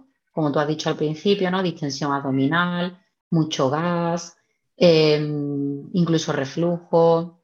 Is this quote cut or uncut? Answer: uncut